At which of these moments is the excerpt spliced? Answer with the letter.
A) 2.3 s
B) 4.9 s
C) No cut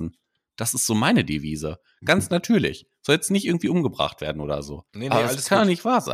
B